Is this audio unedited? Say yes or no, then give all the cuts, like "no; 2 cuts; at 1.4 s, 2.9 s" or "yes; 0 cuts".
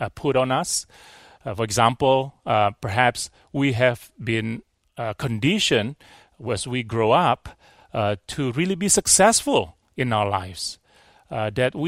yes; 0 cuts